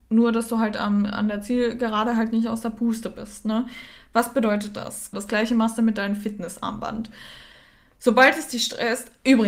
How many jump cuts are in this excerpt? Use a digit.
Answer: 1